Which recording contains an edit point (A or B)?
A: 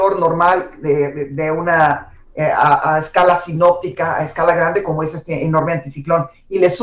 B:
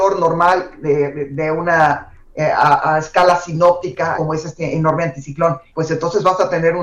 B